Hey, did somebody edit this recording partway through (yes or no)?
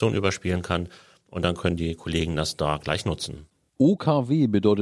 no